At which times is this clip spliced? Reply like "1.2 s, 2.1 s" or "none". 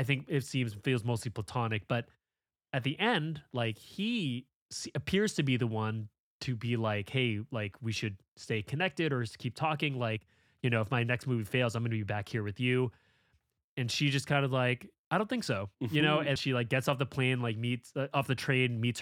16.4 s